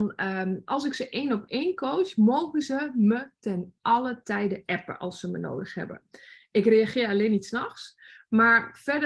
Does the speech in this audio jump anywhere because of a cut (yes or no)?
no